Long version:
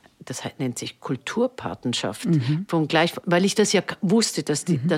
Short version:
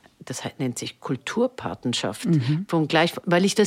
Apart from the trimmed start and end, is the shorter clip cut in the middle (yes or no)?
no